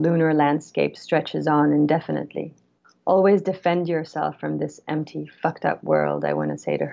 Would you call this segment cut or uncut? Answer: uncut